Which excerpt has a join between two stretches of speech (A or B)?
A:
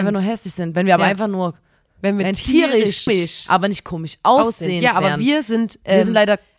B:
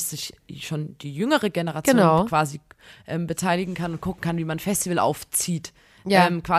A